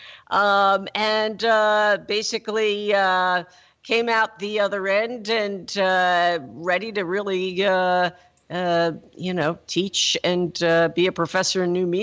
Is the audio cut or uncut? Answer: uncut